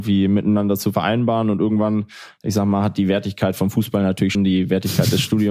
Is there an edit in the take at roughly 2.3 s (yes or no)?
no